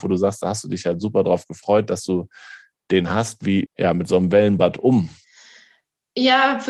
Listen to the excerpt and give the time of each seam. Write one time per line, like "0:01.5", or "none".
0:03.7

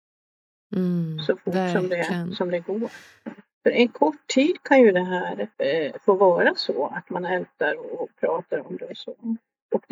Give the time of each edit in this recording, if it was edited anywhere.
0:03.5
0:05.5

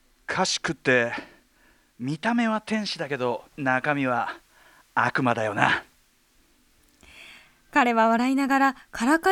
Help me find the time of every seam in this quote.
0:03.5

